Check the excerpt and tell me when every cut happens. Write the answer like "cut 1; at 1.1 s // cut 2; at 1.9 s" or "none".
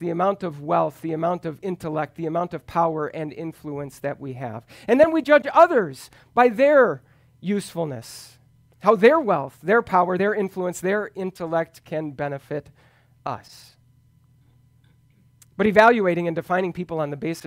none

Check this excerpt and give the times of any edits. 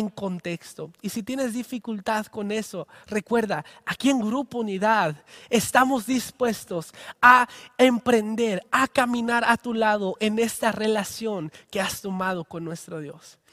none

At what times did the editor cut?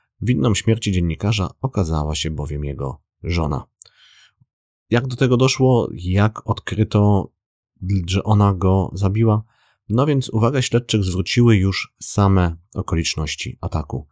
none

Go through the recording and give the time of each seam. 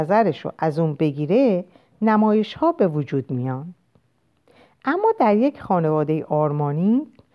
none

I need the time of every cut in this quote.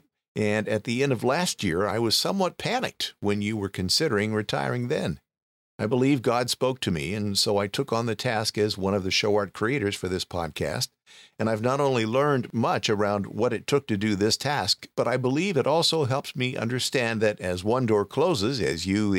none

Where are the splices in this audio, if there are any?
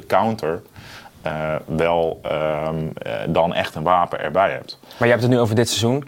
none

